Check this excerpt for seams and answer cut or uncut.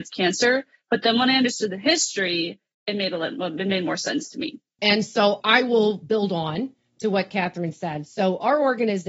cut